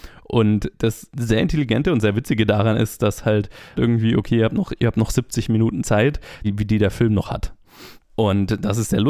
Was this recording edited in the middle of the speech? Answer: yes; 3 cuts; at 3.8 s, 6.4 s, 8.0 s

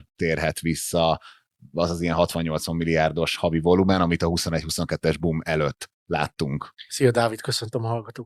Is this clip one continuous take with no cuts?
no; 1 cut; at 6.9 s

